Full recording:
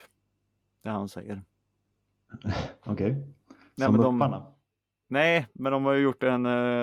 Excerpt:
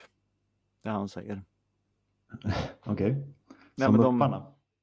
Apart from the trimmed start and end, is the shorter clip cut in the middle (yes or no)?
no